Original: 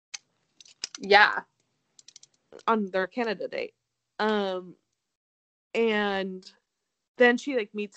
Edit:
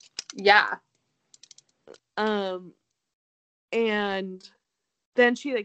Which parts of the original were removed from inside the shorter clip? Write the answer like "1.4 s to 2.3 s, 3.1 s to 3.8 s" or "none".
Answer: 2.6 s to 4.0 s